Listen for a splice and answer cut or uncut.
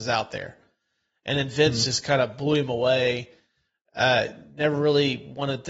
uncut